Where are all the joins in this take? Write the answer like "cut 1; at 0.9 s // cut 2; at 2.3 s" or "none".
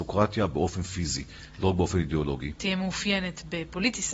cut 1; at 2.6 s